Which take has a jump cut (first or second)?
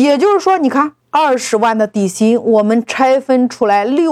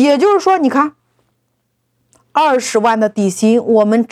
first